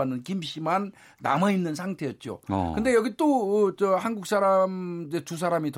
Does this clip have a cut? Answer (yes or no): no